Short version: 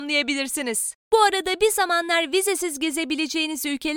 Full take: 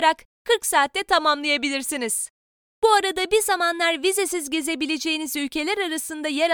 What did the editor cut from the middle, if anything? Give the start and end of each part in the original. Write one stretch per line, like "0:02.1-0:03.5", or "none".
0:02.4-0:02.7

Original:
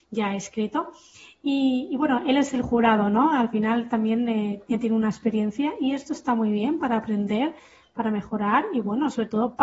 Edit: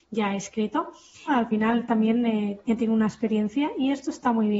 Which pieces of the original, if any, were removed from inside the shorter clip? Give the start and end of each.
0:01.3-0:03.3

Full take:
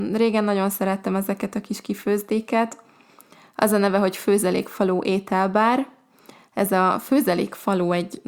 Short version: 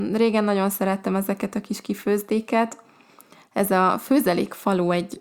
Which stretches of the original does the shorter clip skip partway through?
0:03.4-0:06.4

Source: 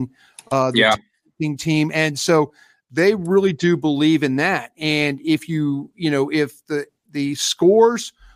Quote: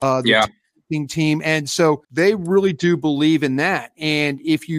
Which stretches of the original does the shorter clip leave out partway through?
0:02.5-0:02.8

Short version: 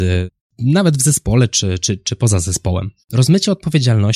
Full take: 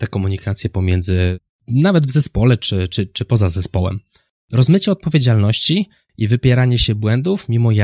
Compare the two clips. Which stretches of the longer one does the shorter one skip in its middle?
0:04.1-0:04.4

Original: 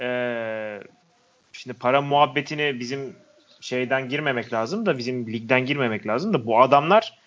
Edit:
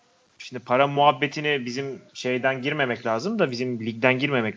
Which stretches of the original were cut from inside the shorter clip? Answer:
0:03.2-0:03.5

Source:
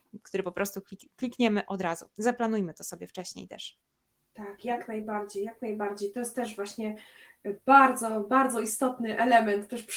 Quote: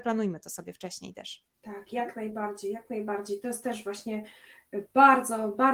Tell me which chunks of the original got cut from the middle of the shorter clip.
0:03.9-0:04.3

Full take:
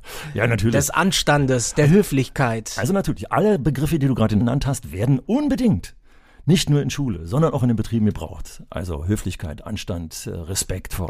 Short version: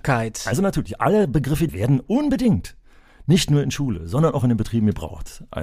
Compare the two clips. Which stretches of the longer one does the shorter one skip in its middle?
0:04.0-0:04.9

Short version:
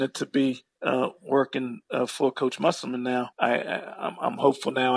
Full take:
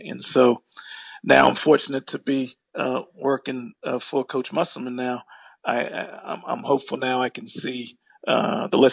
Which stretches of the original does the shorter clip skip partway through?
0:05.3-0:05.6

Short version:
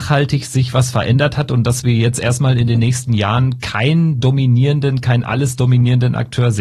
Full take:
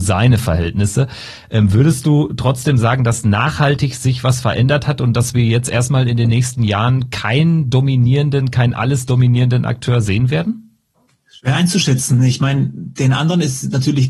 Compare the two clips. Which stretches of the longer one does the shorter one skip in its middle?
none

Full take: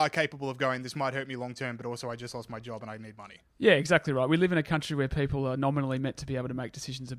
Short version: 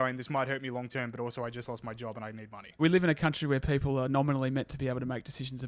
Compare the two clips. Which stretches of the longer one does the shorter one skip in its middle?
0:03.4-0:04.3

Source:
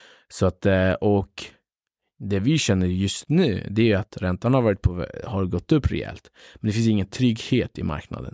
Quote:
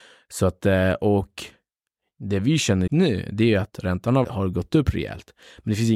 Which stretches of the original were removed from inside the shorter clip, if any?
0:02.9-0:03.3
0:04.6-0:05.2

